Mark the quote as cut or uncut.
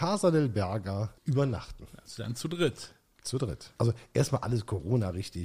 cut